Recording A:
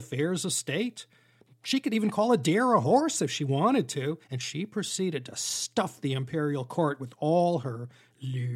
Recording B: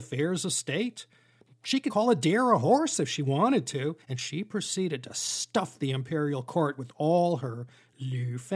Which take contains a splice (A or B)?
B